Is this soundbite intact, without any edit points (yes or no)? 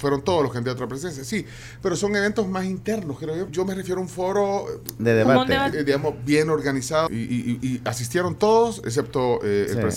no